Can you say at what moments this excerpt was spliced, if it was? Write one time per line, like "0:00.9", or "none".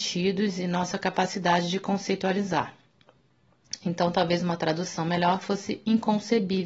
none